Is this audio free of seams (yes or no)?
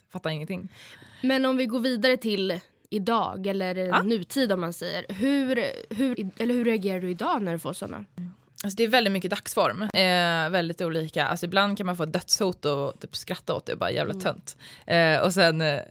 no